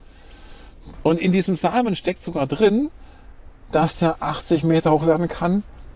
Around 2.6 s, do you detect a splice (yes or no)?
no